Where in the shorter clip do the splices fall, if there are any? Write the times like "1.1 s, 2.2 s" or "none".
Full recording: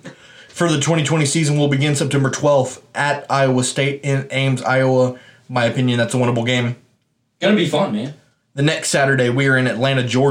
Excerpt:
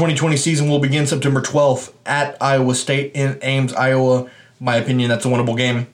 none